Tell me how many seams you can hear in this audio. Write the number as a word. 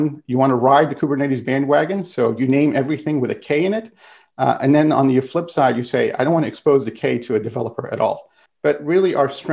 one